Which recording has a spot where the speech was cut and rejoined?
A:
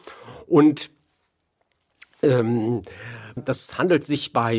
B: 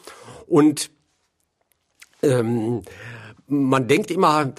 A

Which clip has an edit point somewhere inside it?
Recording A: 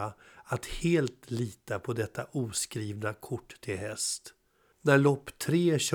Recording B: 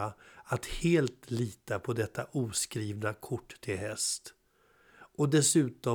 A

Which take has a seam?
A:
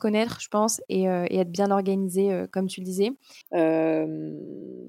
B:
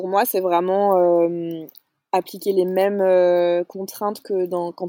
A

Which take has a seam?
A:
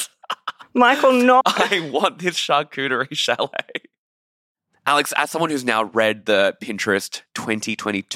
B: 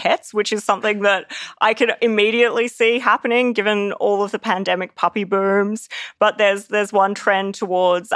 A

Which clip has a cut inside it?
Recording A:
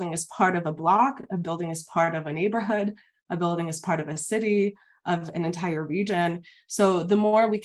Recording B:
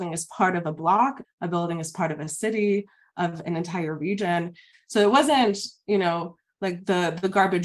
B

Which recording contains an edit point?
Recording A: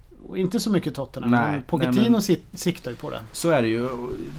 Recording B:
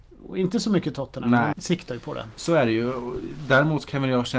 B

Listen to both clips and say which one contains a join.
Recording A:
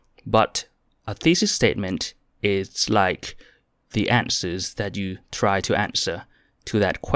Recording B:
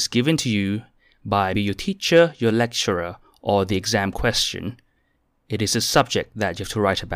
B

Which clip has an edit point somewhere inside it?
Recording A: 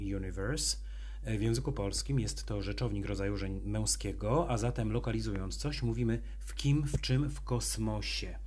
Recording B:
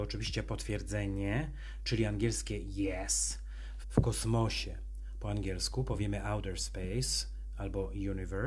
B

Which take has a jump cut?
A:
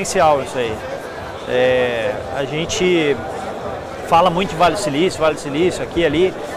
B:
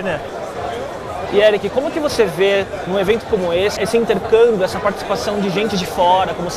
B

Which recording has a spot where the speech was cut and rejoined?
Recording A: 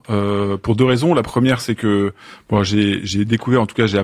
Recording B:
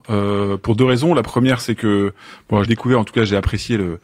B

